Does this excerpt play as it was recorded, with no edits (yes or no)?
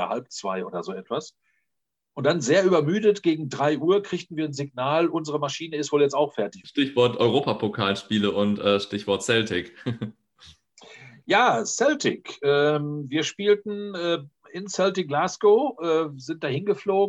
no